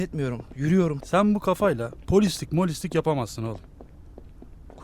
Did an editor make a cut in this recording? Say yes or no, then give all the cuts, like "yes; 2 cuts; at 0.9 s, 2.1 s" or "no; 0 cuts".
yes; 1 cut; at 1.0 s